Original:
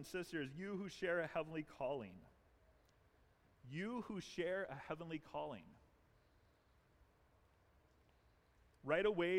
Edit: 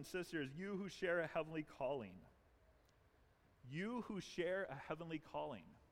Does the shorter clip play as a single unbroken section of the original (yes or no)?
yes